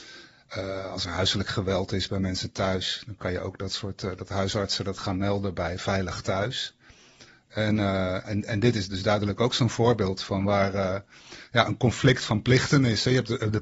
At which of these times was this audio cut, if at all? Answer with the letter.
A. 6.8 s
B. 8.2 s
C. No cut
B